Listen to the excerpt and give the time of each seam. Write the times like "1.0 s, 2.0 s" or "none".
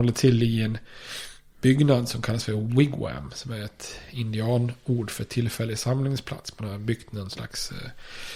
none